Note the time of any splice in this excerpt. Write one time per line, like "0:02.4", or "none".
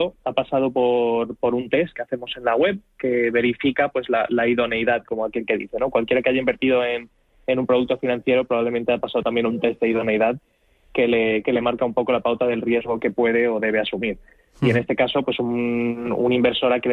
none